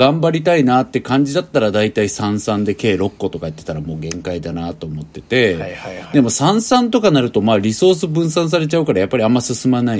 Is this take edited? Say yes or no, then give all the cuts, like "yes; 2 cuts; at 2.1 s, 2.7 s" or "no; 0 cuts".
no; 0 cuts